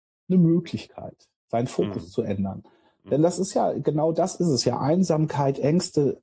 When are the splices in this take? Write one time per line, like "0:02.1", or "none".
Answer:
none